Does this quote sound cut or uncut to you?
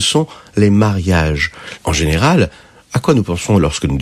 cut